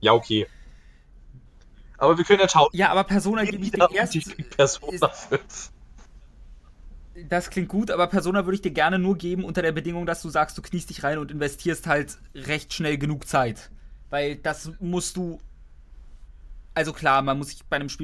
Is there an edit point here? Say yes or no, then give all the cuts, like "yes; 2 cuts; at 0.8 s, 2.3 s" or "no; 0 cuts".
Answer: no; 0 cuts